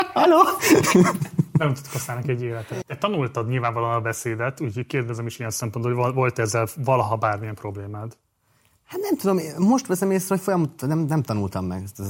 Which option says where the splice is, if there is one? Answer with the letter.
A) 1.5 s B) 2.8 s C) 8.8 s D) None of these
B